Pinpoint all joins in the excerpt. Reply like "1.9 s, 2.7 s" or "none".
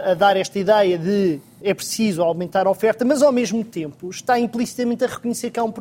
1.6 s